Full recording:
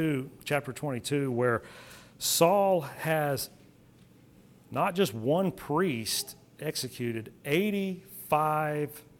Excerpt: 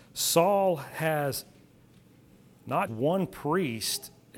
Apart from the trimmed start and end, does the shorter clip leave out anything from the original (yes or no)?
yes